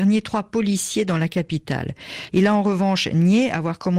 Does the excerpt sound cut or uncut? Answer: cut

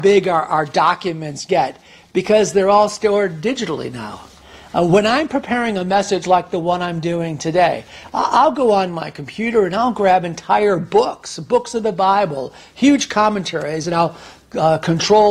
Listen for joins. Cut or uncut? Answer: uncut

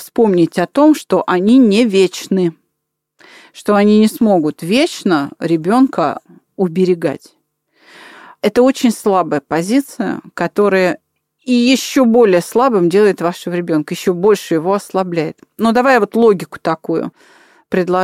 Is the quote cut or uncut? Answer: uncut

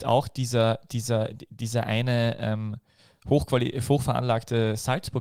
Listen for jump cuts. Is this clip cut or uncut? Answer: uncut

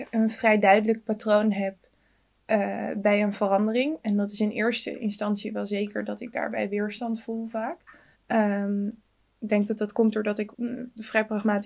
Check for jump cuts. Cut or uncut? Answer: cut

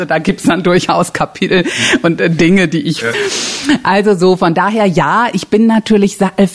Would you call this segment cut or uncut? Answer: cut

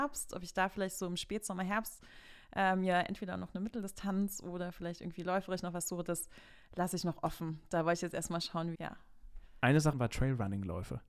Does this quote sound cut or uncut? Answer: cut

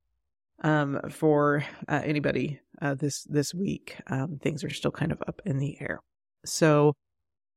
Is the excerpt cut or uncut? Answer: uncut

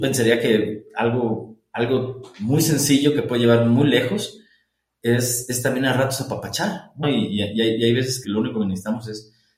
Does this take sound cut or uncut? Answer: cut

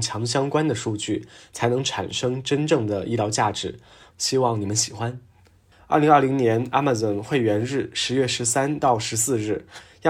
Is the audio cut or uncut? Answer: cut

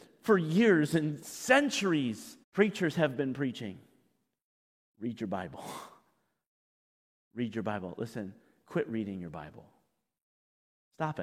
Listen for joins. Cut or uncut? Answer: cut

